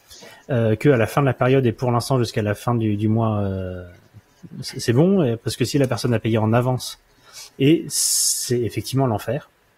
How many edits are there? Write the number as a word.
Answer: one